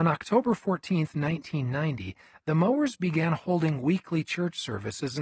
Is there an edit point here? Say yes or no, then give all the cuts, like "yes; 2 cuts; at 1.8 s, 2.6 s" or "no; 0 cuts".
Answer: no; 0 cuts